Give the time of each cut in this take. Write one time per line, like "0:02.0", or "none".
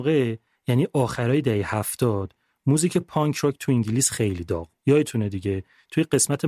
0:04.8